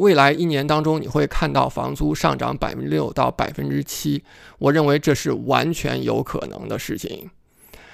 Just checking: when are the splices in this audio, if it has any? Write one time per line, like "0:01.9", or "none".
none